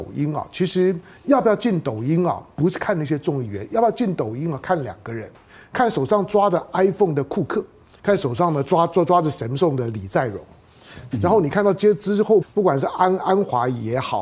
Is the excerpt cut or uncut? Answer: cut